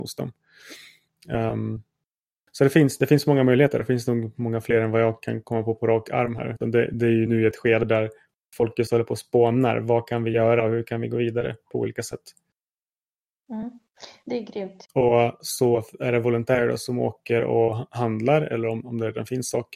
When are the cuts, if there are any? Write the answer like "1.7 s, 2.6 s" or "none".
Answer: 14.8 s